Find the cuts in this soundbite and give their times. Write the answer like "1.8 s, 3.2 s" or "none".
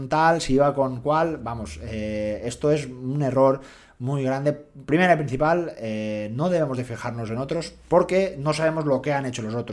none